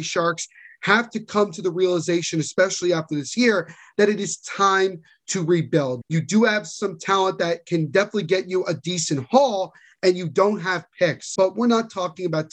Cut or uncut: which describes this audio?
cut